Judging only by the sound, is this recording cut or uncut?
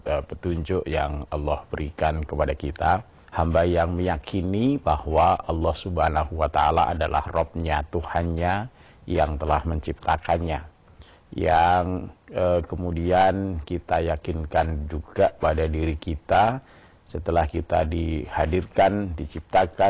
cut